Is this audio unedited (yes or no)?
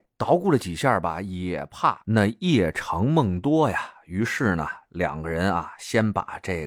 yes